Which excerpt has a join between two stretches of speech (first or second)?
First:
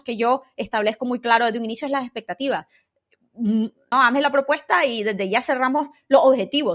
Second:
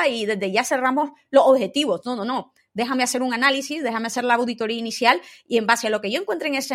first